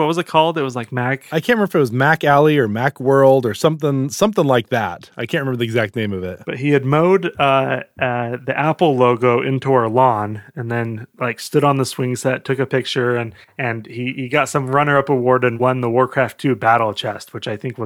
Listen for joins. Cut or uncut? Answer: uncut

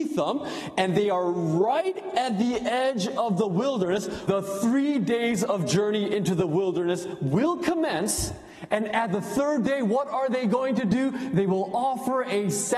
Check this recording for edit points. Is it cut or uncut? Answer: cut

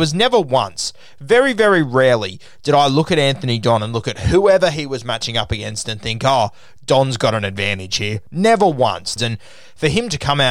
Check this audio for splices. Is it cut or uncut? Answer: cut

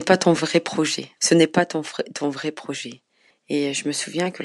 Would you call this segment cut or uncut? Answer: cut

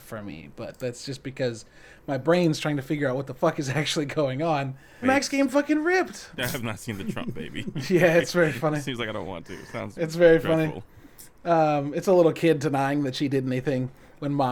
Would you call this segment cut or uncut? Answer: cut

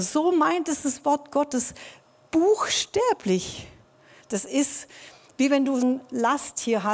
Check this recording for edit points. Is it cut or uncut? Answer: cut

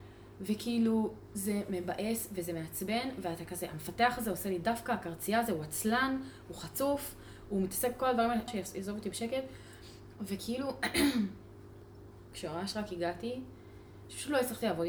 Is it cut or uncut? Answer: cut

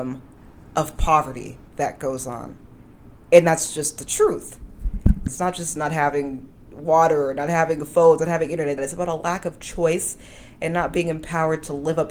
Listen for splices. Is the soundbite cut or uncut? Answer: cut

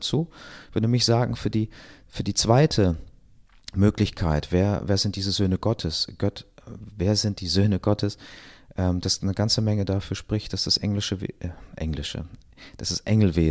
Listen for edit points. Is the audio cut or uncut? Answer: uncut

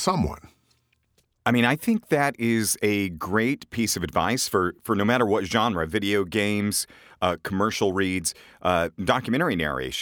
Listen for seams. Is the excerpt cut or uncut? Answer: uncut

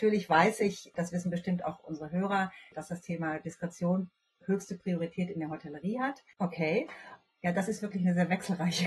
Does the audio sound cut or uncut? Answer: cut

